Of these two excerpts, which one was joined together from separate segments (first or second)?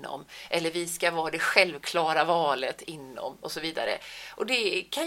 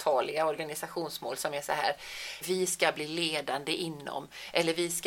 second